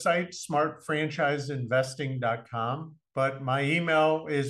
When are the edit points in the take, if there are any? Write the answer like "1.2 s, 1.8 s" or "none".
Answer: 3.1 s